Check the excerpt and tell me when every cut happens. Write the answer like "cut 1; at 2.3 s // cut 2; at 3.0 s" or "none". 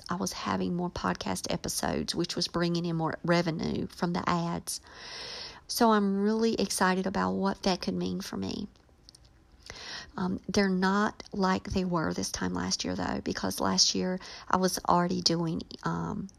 cut 1; at 5.6 s // cut 2; at 10.1 s